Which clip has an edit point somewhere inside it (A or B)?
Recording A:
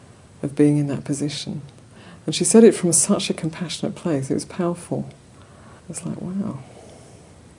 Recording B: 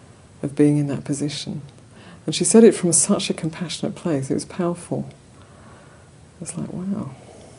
A